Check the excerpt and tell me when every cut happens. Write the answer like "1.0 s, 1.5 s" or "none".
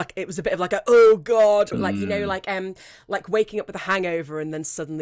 1.7 s